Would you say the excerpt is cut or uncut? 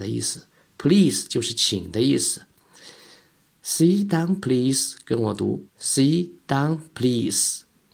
cut